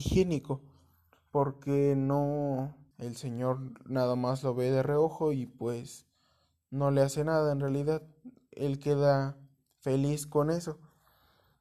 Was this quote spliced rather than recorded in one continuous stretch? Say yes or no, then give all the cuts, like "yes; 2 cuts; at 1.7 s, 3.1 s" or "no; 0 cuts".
yes; 1 cut; at 2.9 s